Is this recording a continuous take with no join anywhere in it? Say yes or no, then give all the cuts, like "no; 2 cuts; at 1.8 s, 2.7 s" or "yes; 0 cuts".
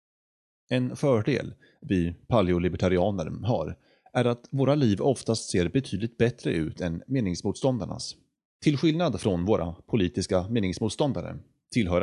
no; 1 cut; at 8.5 s